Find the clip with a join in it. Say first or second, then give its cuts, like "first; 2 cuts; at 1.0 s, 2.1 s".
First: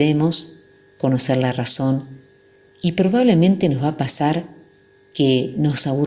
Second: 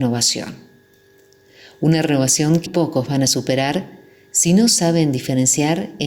second; 1 cut; at 2.7 s